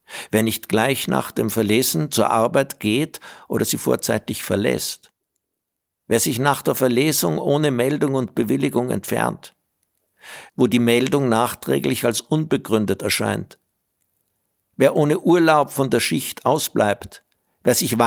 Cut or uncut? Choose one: cut